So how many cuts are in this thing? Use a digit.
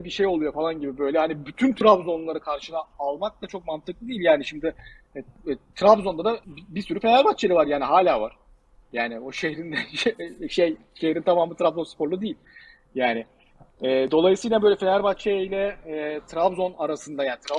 1